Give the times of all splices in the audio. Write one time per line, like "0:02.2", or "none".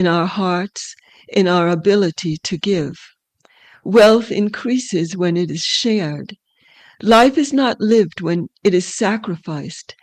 none